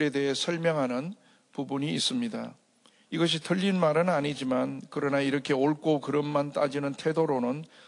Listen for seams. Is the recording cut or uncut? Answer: cut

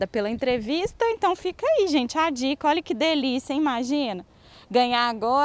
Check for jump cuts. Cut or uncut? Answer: uncut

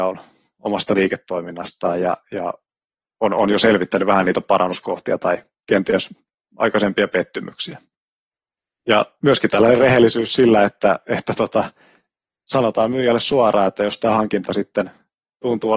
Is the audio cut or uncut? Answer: uncut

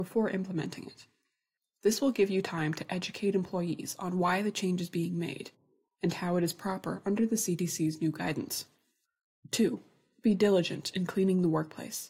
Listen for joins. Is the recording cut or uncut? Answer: uncut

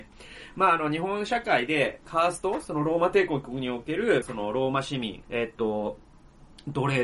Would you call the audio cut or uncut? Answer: cut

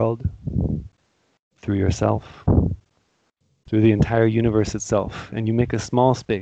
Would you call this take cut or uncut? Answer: uncut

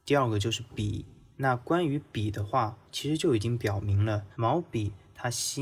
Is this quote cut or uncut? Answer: cut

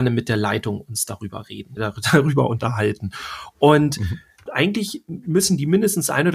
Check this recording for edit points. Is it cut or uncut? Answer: cut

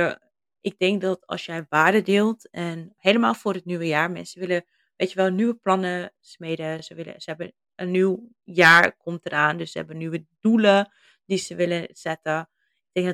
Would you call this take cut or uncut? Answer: uncut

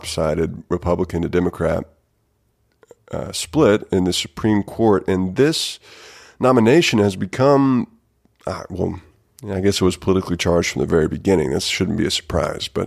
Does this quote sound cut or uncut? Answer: uncut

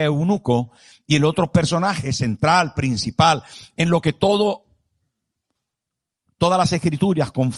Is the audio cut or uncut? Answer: uncut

